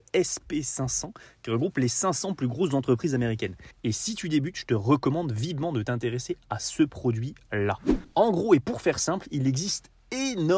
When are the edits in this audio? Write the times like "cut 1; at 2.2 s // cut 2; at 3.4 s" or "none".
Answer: cut 1; at 3.7 s

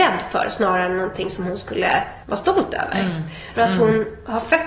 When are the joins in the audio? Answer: cut 1; at 2.2 s // cut 2; at 3.5 s

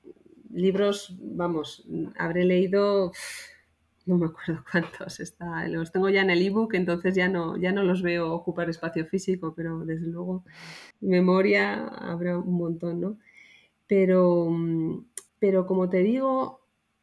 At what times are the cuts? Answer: cut 1; at 10.9 s // cut 2; at 15.3 s

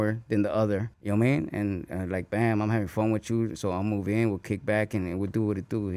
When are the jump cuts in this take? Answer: cut 1; at 0.9 s

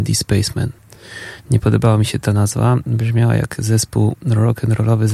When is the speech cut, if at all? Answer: none

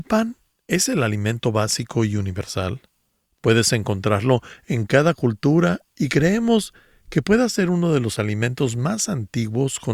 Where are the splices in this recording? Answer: none

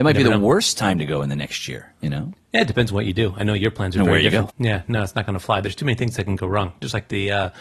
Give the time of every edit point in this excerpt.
cut 1; at 4.5 s

